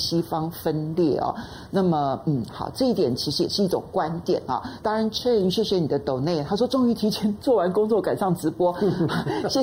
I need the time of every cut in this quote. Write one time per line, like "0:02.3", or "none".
none